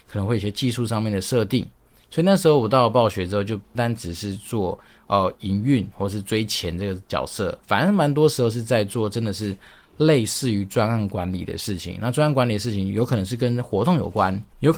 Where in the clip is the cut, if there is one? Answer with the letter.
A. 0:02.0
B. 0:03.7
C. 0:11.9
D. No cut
B